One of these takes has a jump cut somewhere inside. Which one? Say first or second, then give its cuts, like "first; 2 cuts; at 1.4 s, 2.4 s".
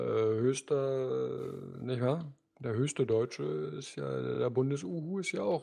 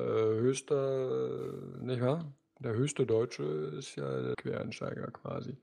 second; 1 cut; at 4.3 s